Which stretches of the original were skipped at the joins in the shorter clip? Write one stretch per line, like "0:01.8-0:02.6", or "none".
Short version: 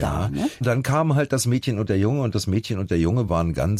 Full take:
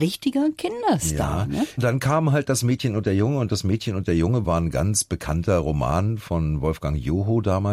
none